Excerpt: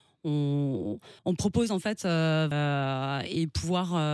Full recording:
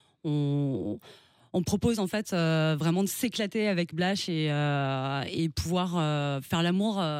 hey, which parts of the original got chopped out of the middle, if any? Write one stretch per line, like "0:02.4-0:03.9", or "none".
0:01.2-0:01.5
0:02.8-0:04.5